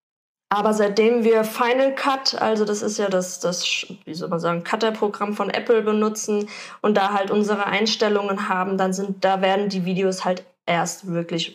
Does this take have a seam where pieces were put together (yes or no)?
no